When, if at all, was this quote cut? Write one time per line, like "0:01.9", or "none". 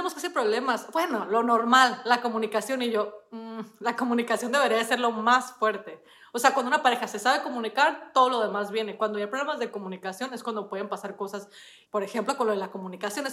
0:11.8